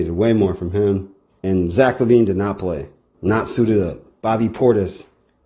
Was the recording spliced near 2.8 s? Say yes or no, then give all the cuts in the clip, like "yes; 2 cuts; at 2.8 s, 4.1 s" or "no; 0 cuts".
no; 2 cuts; at 1.3 s, 4.2 s